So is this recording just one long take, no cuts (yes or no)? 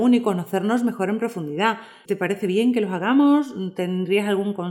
no